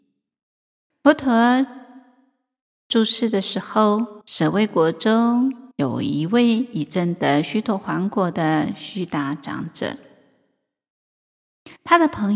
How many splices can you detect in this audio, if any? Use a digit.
3